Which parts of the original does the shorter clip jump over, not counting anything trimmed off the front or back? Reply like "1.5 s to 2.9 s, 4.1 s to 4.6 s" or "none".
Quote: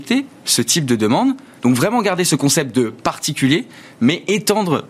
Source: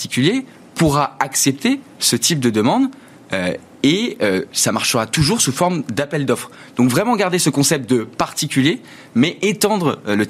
3.1 s to 6.7 s